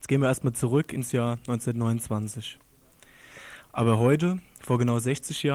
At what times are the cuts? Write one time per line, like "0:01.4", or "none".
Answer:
0:03.6